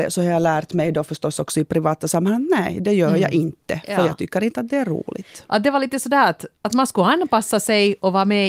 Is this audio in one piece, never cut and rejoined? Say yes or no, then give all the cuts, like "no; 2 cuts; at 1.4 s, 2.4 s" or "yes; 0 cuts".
no; 1 cut; at 5.5 s